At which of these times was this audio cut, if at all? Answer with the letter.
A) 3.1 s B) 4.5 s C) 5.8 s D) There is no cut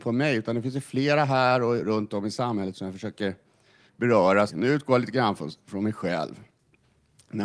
B